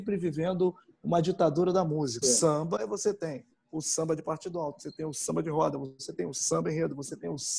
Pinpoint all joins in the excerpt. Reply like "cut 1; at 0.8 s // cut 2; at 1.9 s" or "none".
cut 1; at 2.2 s